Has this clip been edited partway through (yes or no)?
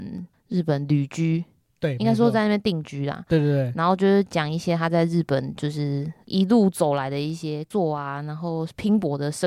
no